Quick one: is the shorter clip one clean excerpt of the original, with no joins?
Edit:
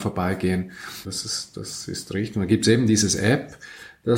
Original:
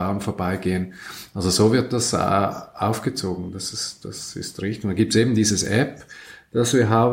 no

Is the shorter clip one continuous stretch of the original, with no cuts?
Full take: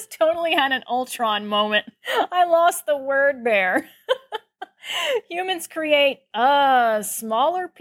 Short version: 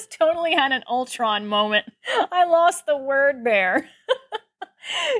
yes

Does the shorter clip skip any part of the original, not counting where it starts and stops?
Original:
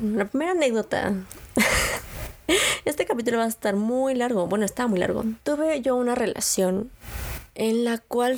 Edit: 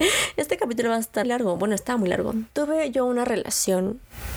yes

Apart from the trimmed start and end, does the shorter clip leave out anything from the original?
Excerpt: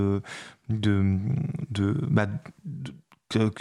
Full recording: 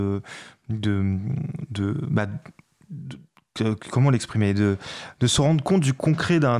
yes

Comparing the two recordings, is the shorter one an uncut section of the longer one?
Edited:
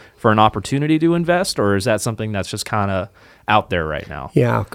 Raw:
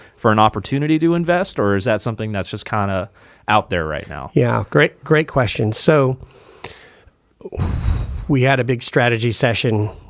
yes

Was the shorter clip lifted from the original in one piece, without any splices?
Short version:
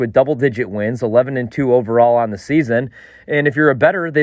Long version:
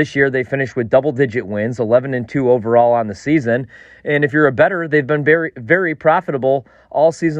yes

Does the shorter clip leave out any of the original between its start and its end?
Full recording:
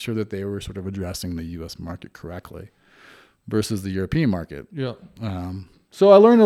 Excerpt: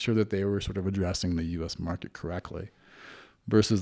no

